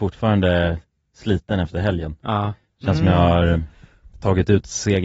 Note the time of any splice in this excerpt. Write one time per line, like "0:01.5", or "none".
none